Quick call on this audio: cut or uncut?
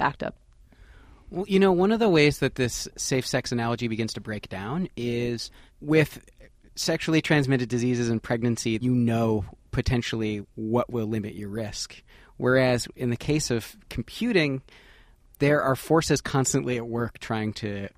uncut